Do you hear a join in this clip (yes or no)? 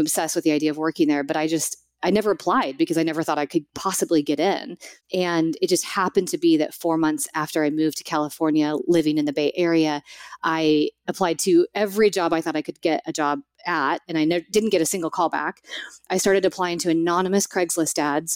no